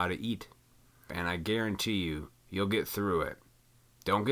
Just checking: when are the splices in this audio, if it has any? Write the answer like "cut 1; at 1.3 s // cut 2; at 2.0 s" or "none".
cut 1; at 1.1 s